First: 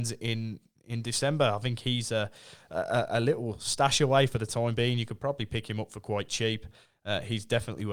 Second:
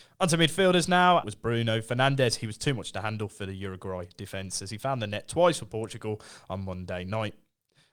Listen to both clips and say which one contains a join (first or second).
second